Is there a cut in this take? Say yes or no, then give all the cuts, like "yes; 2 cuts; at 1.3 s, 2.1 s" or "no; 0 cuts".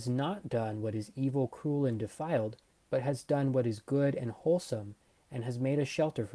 no; 0 cuts